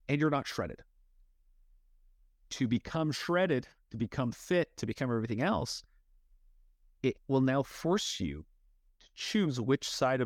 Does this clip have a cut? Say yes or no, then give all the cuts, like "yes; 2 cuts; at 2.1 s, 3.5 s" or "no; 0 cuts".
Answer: no; 0 cuts